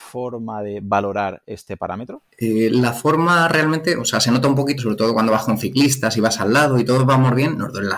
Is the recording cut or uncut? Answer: cut